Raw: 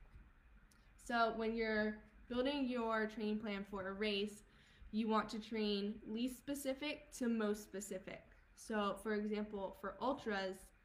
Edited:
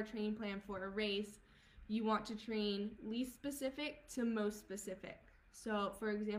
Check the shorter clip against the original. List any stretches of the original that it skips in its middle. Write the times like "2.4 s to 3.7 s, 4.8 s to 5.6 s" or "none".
none